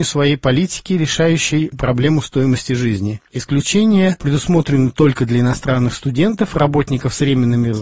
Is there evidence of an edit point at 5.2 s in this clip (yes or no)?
no